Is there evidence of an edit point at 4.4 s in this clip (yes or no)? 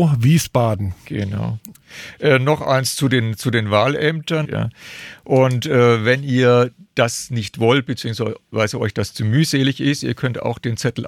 yes